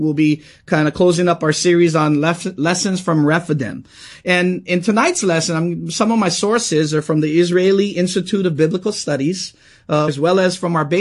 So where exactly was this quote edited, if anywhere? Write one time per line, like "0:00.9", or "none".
0:10.1